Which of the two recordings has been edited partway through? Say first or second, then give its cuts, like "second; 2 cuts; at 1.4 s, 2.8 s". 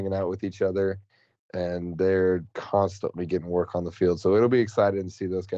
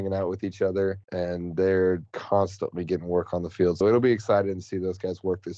second; 2 cuts; at 1.0 s, 3.8 s